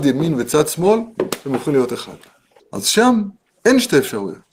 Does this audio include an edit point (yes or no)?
yes